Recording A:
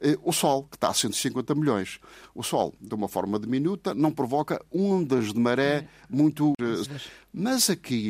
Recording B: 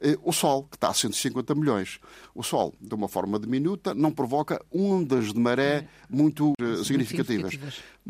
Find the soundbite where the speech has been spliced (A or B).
A